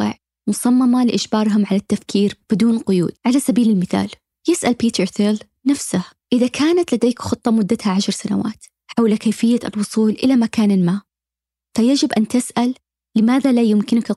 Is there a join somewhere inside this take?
yes; 1 cut; at 3.2 s

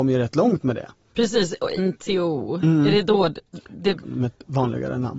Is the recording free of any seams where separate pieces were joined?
no; 2 cuts; at 1.8 s, 4.0 s

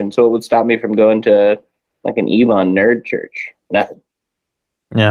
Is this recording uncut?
yes; 0 cuts

